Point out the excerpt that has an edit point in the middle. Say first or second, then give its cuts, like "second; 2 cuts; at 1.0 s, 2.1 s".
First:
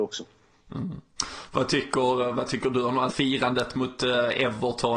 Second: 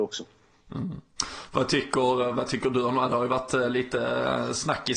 first; 1 cut; at 3.1 s